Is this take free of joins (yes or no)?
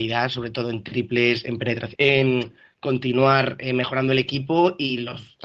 no